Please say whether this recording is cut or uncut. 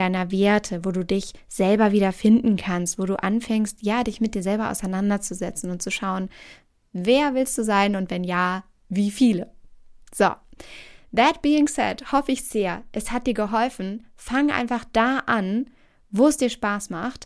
uncut